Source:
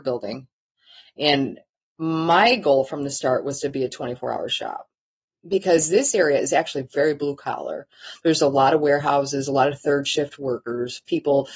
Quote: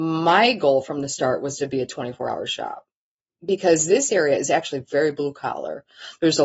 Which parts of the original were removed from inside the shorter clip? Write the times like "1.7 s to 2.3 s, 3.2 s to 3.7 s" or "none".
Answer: none